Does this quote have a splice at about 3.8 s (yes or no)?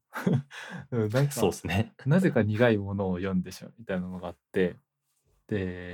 no